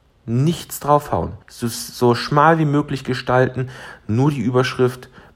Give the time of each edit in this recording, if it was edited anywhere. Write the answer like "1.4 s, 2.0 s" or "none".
1.4 s